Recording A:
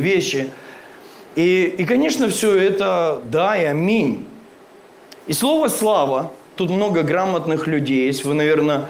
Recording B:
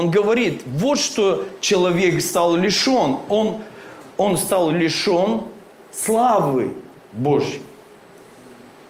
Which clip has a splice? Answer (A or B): A